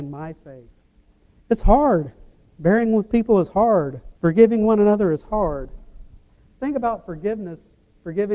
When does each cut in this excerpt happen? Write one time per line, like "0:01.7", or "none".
0:01.4
0:04.1